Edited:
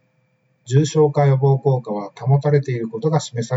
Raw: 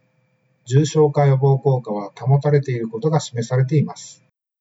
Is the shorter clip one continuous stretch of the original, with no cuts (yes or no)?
yes